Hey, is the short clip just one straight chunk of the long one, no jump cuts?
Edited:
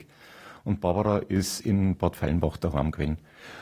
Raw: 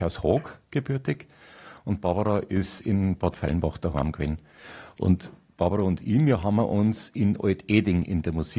yes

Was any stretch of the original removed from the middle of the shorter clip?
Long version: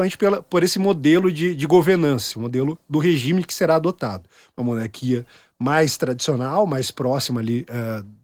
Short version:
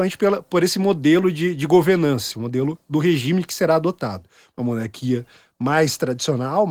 no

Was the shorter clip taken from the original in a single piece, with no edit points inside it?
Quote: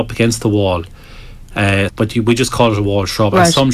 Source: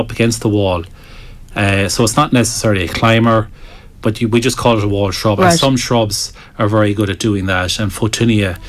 no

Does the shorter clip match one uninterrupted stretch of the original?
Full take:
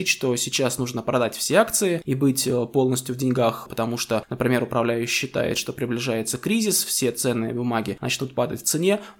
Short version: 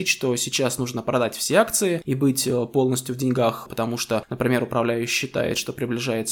yes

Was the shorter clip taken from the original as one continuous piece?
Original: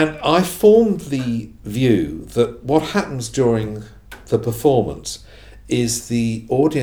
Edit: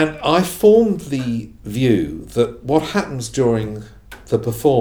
yes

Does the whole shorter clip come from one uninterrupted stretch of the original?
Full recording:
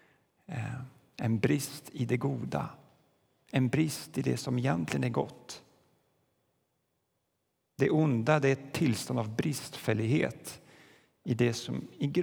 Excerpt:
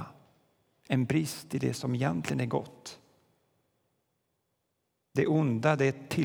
yes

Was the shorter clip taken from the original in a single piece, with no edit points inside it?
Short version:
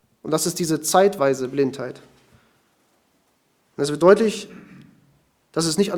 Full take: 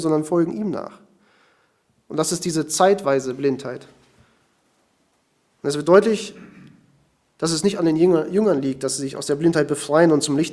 yes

